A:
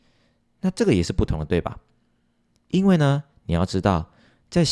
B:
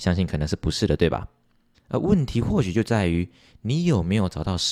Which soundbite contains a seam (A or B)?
B